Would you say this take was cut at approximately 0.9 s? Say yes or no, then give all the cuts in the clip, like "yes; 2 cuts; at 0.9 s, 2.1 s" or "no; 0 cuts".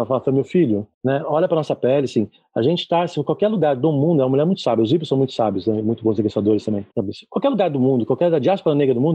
yes; 2 cuts; at 0.9 s, 6.9 s